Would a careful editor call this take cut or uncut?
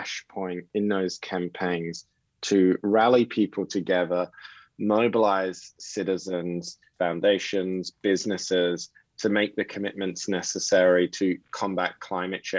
cut